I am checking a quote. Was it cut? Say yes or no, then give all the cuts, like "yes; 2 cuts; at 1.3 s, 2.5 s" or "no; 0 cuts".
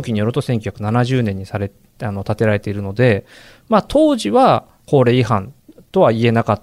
no; 0 cuts